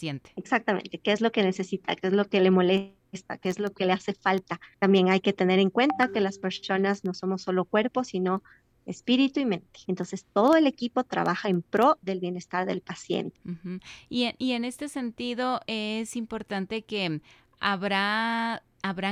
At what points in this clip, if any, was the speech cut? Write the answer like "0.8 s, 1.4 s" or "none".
4.7 s, 9.9 s, 13.4 s